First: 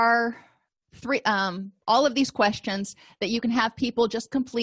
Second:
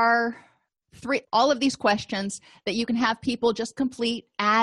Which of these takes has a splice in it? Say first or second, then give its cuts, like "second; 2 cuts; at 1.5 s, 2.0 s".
second; 1 cut; at 1.2 s